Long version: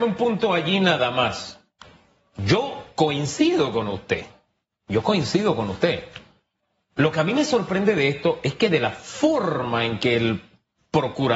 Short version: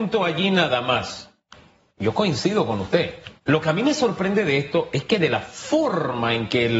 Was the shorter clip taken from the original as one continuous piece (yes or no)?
no